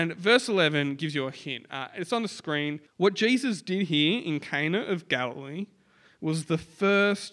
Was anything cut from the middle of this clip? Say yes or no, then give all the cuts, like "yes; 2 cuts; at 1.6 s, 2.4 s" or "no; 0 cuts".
yes; 1 cut; at 2.9 s